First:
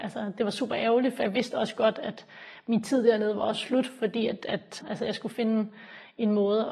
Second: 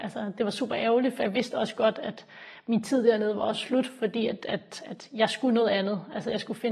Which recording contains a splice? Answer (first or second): first